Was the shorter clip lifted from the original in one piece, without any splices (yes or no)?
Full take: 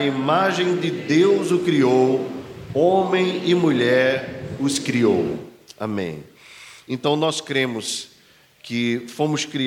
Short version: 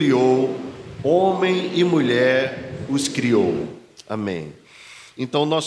yes